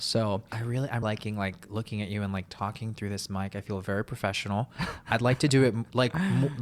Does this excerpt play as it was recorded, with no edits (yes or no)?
no